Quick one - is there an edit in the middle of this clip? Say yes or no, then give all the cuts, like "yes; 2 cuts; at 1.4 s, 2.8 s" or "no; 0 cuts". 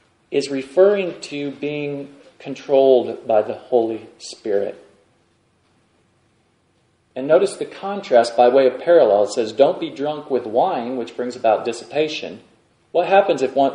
no; 0 cuts